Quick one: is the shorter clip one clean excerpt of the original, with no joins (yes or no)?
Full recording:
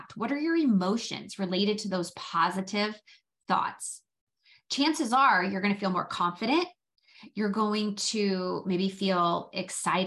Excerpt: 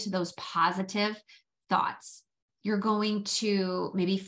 no